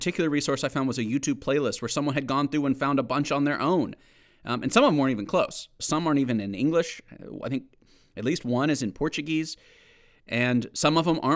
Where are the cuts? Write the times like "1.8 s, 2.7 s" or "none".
5.8 s